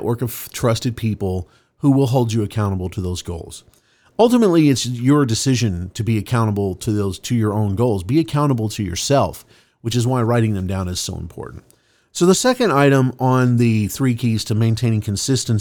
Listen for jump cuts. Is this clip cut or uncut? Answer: uncut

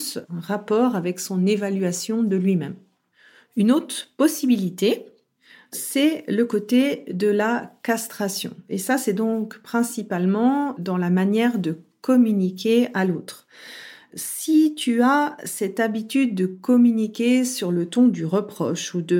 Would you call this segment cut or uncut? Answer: uncut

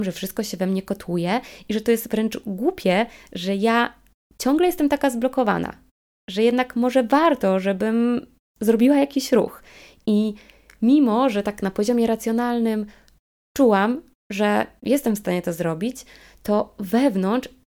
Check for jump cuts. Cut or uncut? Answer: uncut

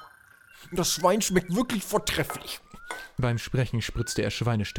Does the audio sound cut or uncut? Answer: uncut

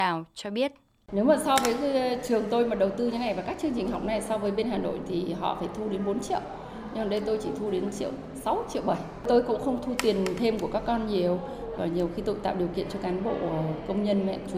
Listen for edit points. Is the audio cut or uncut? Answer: uncut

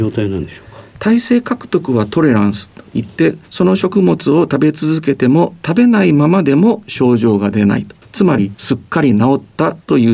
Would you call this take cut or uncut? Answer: uncut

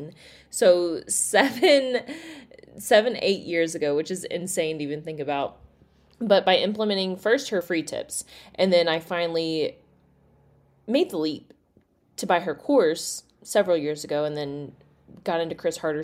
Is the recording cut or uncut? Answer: uncut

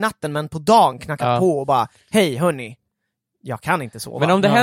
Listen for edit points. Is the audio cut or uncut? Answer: uncut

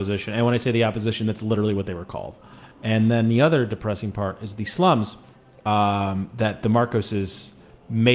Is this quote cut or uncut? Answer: uncut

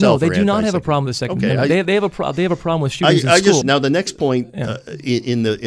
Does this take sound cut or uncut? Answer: cut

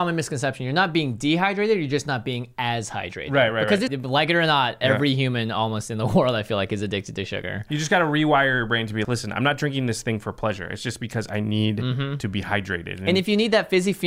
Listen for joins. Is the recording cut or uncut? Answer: cut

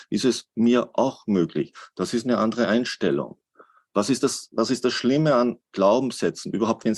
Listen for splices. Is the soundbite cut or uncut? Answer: uncut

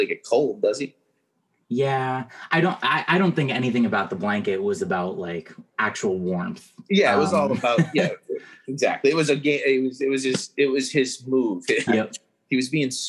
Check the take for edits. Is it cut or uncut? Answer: cut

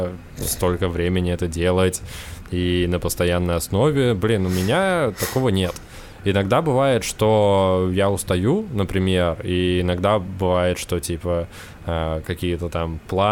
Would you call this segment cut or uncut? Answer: uncut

